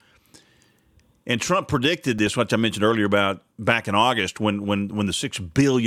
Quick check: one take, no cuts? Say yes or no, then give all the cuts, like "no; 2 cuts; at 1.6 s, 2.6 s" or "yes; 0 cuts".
yes; 0 cuts